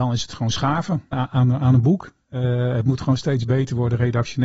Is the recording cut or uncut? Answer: cut